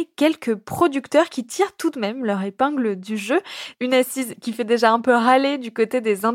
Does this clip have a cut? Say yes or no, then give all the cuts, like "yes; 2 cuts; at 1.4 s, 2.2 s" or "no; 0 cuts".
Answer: yes; 1 cut; at 3.7 s